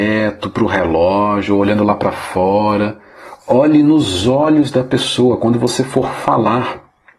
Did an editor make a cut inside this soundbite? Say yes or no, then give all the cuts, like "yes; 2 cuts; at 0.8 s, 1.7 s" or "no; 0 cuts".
yes; 1 cut; at 3.4 s